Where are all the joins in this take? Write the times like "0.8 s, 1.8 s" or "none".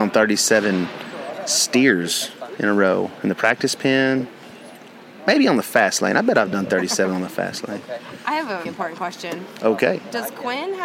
8.7 s